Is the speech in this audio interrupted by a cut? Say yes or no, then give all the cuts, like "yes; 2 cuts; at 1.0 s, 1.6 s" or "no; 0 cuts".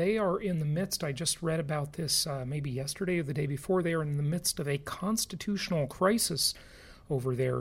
no; 0 cuts